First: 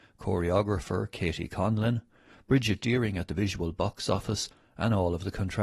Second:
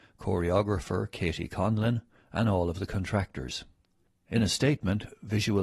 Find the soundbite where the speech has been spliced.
second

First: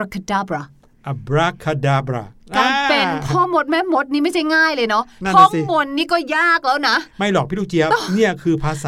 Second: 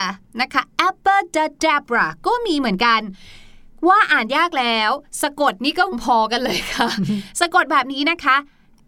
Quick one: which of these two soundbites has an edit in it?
second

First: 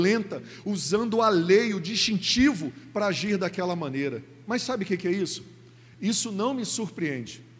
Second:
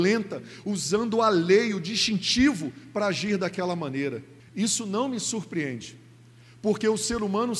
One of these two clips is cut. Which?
second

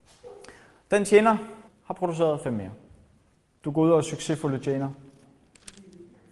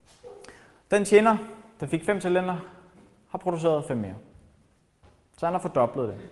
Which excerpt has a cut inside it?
first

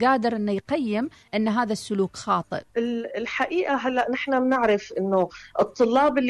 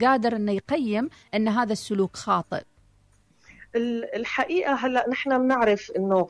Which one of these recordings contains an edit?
first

